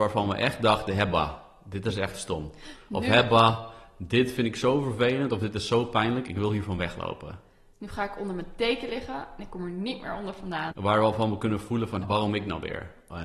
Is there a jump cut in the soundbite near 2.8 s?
no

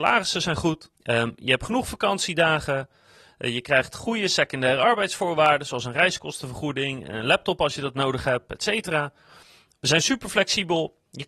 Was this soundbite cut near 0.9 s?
yes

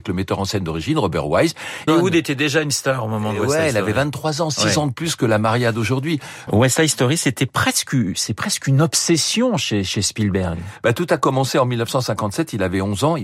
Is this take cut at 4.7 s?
no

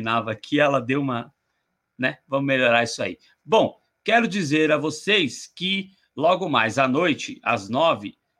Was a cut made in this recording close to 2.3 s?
no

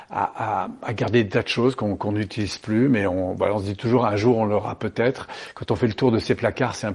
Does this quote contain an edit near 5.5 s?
no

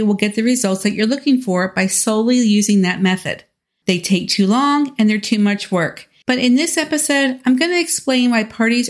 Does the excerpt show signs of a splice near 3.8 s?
yes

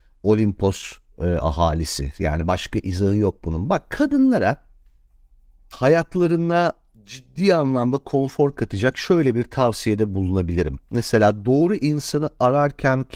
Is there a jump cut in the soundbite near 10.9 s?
yes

